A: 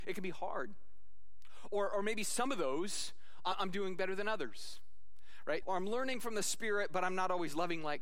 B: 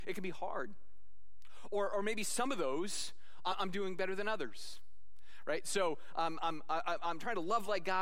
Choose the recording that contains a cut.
A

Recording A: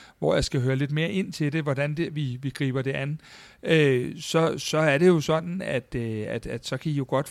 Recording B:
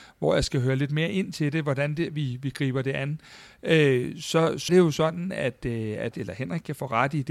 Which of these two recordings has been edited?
B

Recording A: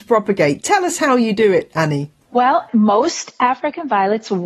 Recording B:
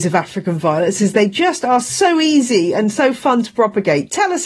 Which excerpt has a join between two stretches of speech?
A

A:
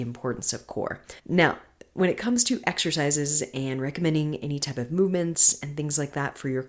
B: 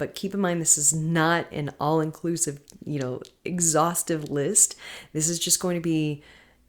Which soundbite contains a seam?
A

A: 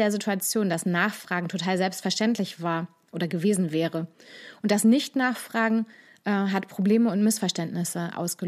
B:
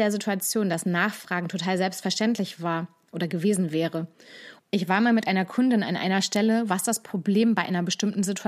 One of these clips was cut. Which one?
B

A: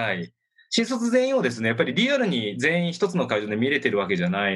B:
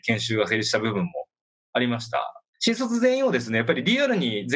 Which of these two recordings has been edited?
B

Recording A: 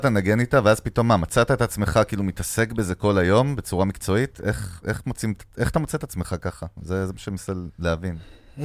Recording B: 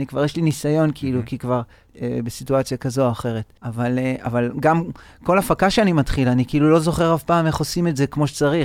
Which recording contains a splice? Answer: B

